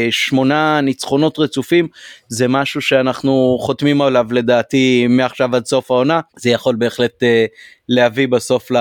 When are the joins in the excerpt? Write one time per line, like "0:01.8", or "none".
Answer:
0:06.3